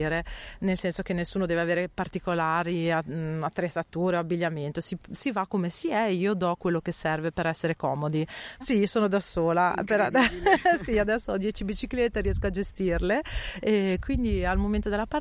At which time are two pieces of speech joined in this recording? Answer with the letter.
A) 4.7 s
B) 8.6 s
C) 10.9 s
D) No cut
B